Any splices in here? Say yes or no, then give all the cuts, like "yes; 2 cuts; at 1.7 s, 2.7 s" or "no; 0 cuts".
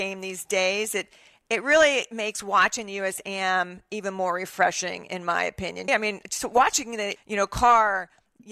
yes; 2 cuts; at 5.9 s, 7.2 s